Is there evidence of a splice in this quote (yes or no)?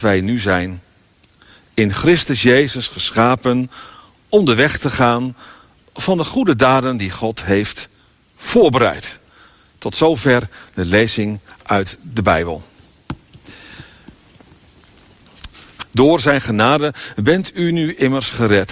yes